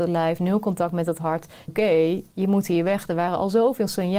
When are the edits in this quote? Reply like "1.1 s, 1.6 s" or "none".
1.7 s

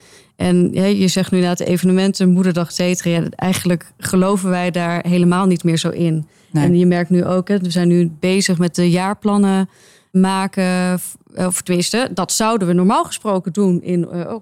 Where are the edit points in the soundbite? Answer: none

